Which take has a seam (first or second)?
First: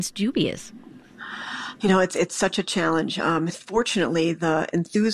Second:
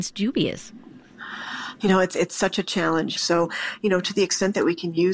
second